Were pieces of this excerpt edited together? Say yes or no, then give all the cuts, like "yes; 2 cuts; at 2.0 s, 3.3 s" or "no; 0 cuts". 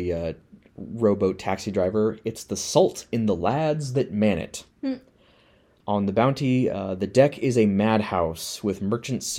no; 0 cuts